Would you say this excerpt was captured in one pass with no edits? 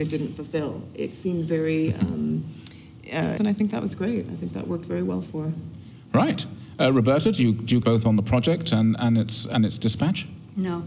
no; 2 cuts; at 3.4 s, 7.8 s

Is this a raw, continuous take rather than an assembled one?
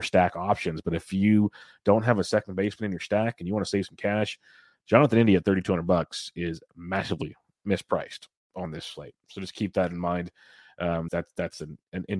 no; 1 cut; at 11.1 s

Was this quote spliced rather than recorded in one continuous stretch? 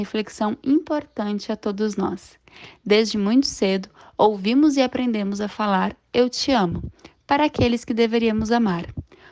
no; 0 cuts

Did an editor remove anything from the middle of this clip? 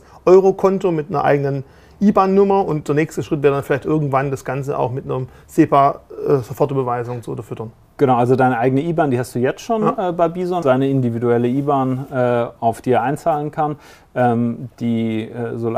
yes; 1 cut; at 10.6 s

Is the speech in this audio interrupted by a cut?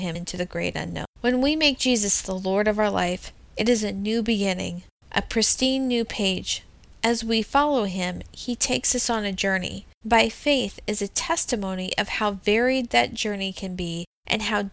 yes; 2 cuts; at 1.1 s, 10.0 s

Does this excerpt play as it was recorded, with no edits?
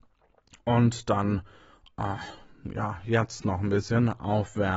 yes; 0 cuts

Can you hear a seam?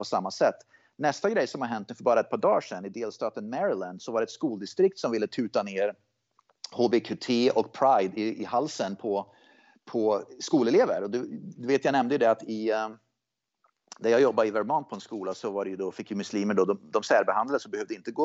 no; 0 cuts

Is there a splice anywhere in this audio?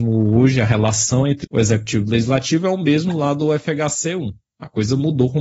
yes; 1 cut; at 1.4 s

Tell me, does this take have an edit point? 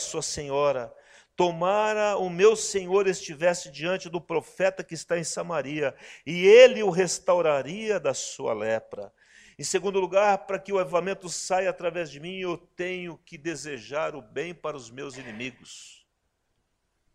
no; 0 cuts

